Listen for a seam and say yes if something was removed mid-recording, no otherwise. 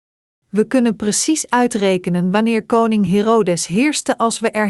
no